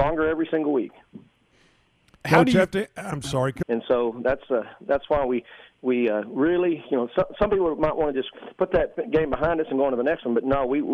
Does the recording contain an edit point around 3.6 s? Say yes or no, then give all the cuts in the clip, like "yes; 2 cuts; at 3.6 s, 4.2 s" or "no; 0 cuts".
yes; 1 cut; at 3.6 s